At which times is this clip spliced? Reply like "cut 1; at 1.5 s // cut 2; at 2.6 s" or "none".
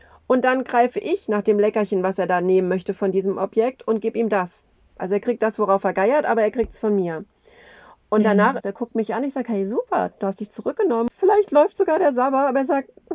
cut 1; at 8.6 s // cut 2; at 11.1 s